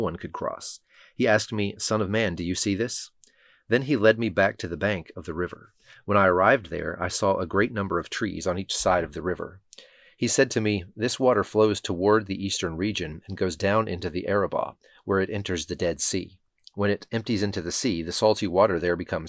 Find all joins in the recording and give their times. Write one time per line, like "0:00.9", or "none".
none